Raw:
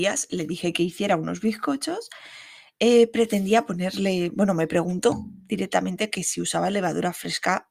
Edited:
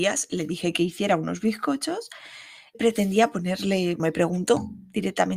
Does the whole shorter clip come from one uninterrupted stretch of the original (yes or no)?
no